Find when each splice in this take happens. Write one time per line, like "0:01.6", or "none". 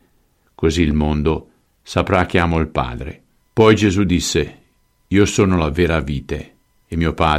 0:03.4

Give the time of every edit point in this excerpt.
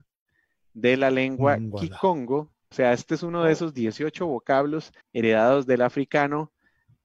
0:02.7
0:05.0

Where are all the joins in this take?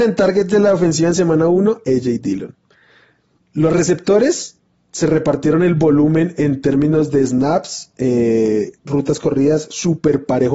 0:03.4
0:08.8

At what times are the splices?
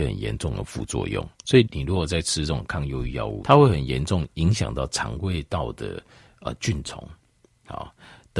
0:01.7
0:03.4

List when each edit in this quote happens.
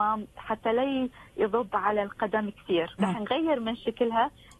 0:03.0

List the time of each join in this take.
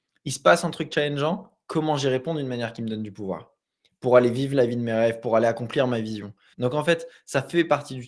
0:06.5

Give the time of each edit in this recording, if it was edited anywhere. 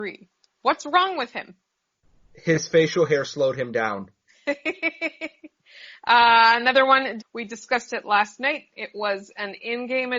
0:07.2

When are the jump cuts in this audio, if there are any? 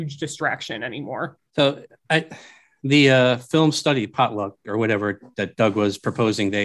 0:01.5

